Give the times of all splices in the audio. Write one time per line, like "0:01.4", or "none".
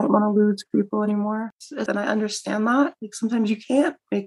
0:01.9
0:03.0